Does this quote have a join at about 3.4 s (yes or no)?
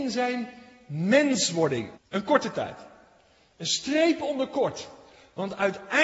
no